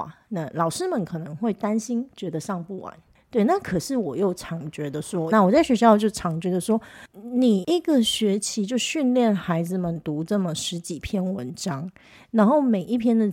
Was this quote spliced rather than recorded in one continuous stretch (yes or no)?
yes